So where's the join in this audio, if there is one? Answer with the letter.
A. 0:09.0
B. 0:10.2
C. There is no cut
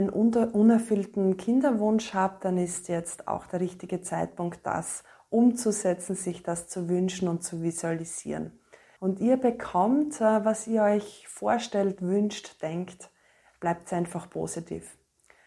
A